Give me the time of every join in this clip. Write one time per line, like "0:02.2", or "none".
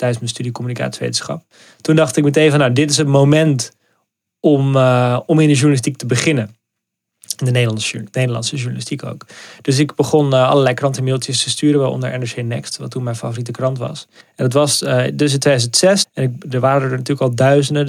0:14.2
0:16.0

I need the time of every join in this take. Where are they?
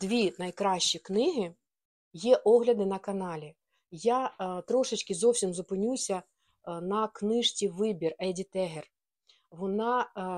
0:02.1

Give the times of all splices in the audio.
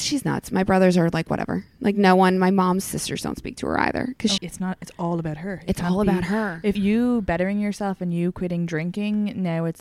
0:04.4
0:06.7

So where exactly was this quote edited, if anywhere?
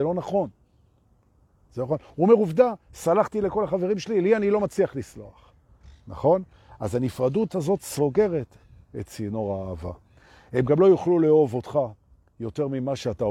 none

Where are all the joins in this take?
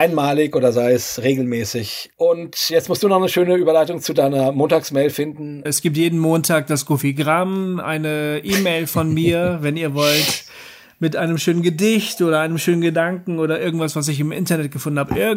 0:02.1
0:05.6

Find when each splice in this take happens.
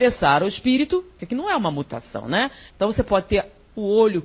0:01.2
0:02.7

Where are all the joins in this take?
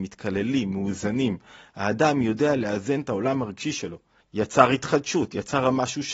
0:04.2

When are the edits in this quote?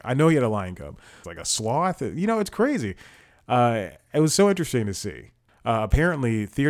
0:01.2
0:05.5

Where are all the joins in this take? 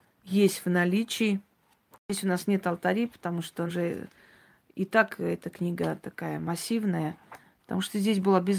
0:03.7
0:07.6

